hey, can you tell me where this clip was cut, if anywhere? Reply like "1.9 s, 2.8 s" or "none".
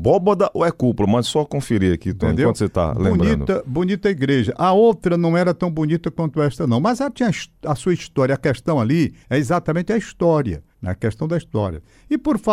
9.2 s, 10.7 s